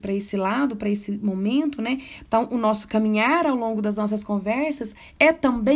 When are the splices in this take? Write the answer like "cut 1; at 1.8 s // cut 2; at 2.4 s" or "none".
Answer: cut 1; at 2.3 s